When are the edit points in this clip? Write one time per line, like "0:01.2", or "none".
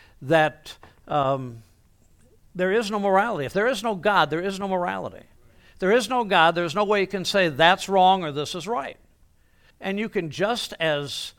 0:09.7